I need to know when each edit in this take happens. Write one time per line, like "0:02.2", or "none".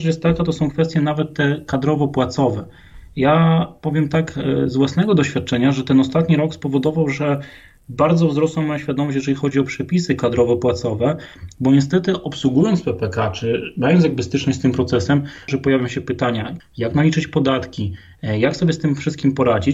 0:15.5
0:16.6